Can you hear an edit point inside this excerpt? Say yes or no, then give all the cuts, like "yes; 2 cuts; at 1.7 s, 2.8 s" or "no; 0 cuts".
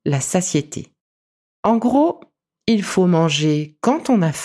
yes; 1 cut; at 1.4 s